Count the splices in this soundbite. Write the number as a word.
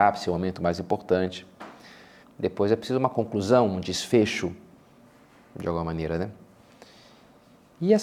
one